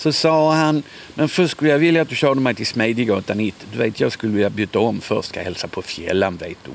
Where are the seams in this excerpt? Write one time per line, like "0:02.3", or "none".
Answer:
none